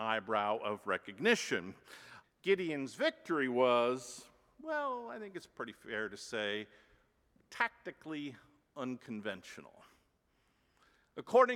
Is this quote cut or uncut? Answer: cut